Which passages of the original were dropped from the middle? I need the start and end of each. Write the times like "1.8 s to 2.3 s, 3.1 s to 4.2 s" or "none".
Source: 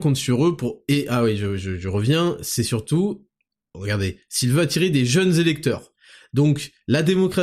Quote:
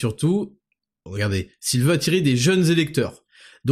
none